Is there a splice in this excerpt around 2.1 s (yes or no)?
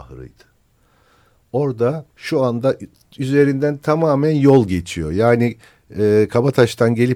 yes